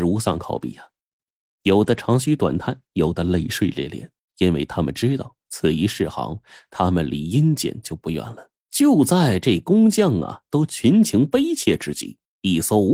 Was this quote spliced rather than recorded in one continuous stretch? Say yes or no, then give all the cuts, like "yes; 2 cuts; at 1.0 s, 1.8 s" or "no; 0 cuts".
yes; 1 cut; at 8.6 s